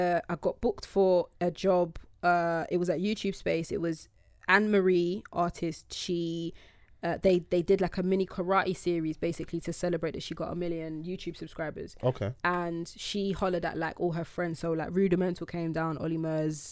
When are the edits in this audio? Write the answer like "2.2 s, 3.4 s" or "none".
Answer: none